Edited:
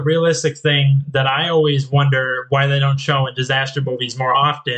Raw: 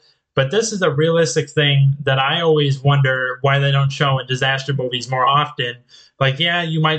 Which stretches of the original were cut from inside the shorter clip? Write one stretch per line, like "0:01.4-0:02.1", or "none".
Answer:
none